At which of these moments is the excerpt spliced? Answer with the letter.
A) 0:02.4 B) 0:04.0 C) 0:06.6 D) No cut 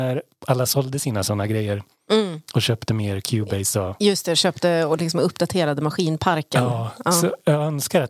D